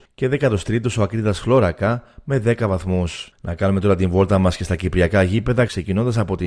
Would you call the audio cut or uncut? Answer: cut